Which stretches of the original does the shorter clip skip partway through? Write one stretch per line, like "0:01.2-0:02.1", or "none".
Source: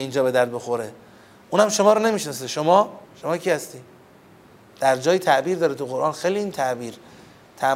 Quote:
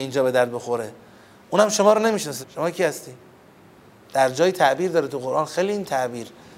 0:02.4-0:03.1